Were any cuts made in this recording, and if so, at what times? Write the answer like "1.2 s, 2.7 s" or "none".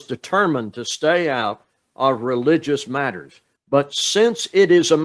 3.6 s